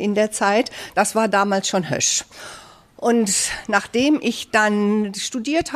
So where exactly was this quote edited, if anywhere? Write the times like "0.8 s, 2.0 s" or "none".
none